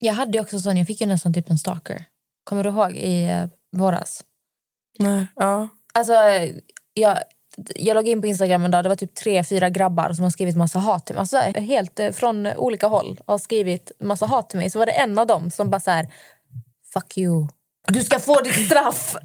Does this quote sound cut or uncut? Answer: cut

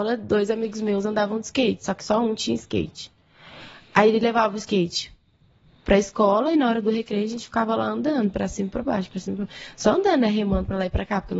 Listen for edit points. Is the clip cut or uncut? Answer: uncut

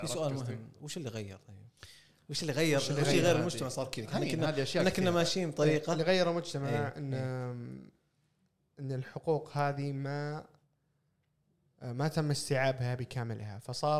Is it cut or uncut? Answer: uncut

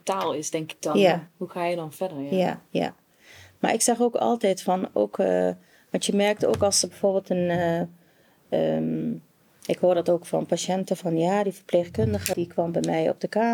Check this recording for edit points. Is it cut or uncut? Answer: uncut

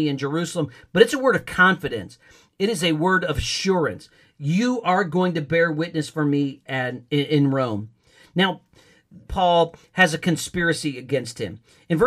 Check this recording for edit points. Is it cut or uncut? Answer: cut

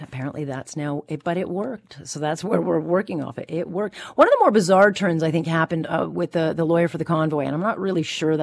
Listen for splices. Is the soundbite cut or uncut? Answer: uncut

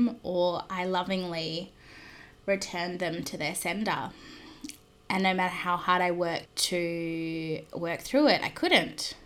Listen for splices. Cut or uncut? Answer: cut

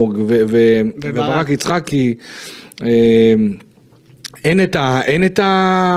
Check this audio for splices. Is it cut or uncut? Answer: uncut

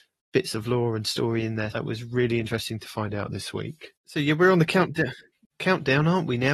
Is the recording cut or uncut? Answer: cut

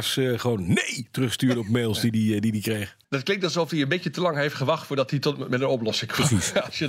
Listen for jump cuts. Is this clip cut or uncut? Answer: cut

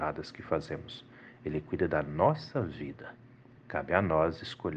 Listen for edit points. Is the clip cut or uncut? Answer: uncut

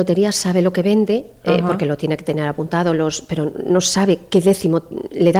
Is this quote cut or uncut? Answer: uncut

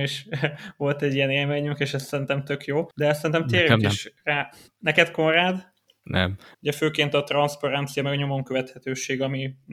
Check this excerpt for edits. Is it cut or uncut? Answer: cut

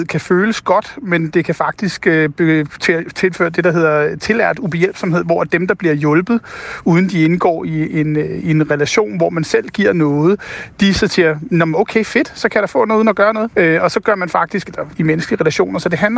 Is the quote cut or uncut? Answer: cut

